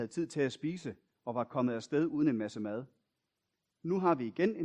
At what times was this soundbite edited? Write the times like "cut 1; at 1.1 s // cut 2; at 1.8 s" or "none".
none